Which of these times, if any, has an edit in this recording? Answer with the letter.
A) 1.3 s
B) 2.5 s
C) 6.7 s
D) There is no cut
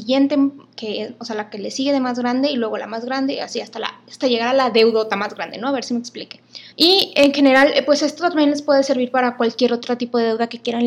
C